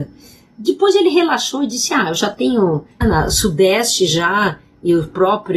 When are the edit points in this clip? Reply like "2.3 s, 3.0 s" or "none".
3.0 s